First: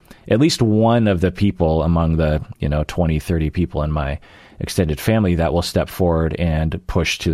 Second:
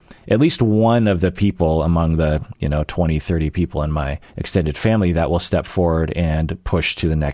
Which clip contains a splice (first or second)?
second